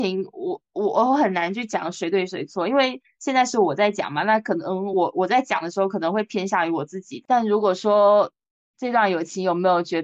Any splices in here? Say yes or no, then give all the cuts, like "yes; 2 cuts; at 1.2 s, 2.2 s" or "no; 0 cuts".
no; 0 cuts